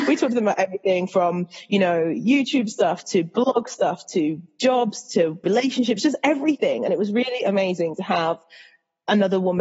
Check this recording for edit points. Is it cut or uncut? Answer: uncut